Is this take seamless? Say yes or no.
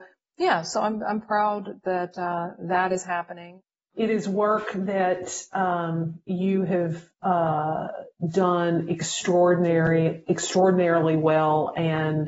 yes